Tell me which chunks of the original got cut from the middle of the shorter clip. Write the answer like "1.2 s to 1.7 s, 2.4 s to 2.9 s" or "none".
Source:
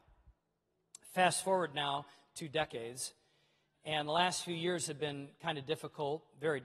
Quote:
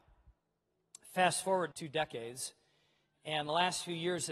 1.7 s to 2.3 s